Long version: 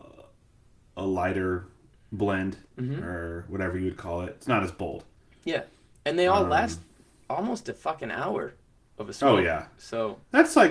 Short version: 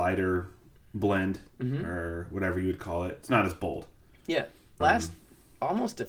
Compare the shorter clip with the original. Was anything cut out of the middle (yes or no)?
yes